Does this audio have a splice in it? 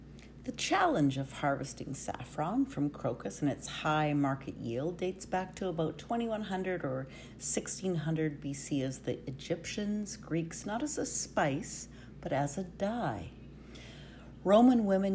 yes; 1 cut; at 10.6 s

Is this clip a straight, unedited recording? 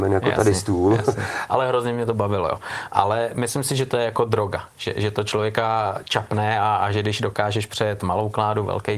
no; 1 cut; at 1.5 s

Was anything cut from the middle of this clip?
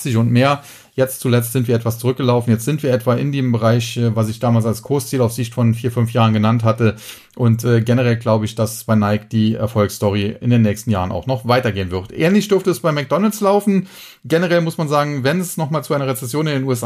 no; 0 cuts

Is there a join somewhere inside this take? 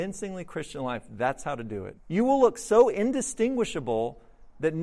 yes; 1 cut; at 2.0 s

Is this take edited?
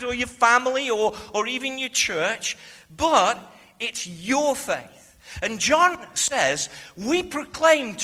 no; 0 cuts

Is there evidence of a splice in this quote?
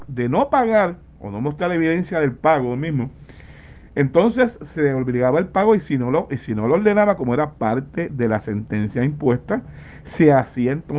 no; 0 cuts

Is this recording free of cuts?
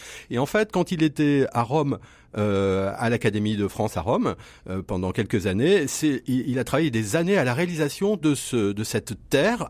yes; 0 cuts

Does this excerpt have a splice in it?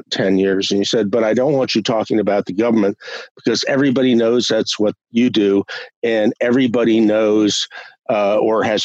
no; 0 cuts

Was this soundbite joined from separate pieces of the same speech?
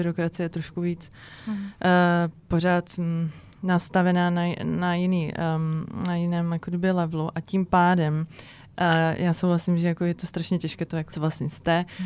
yes; 1 cut; at 11.1 s

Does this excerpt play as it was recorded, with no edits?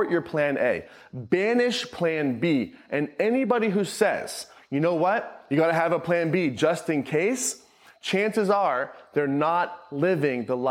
yes; 0 cuts

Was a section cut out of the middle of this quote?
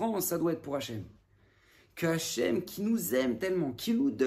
no; 0 cuts

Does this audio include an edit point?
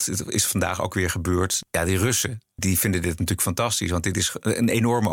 no; 0 cuts

